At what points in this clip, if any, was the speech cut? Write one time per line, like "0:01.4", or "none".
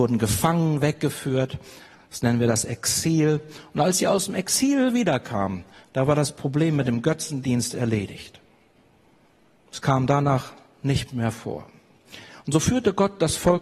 none